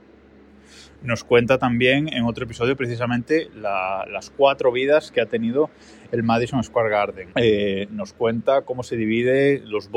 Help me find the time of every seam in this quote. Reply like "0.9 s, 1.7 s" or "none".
7.3 s